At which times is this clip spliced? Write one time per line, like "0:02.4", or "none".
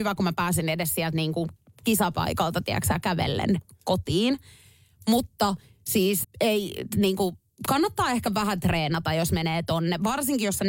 0:06.2